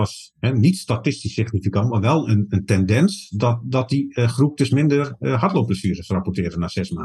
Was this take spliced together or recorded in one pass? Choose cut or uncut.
uncut